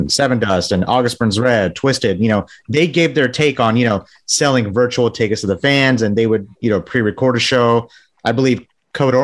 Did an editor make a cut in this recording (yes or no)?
no